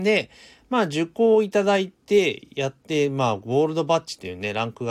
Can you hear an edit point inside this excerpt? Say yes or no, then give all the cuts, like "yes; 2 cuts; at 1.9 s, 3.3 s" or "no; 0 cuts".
no; 0 cuts